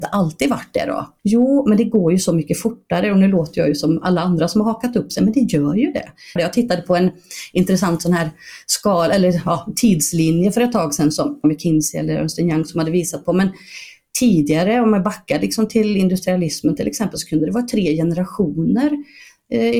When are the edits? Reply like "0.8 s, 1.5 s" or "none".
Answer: 1.2 s, 6.4 s